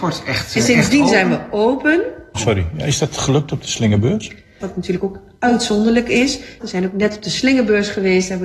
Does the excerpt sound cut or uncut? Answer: cut